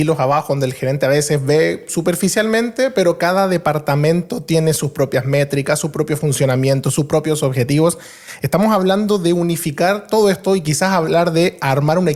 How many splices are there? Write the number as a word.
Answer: zero